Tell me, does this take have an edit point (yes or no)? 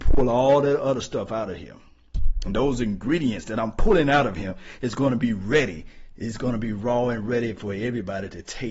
no